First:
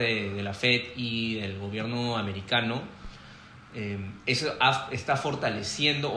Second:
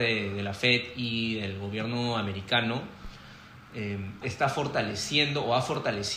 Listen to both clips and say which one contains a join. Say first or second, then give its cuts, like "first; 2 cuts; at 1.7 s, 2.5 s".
second; 1 cut; at 4.2 s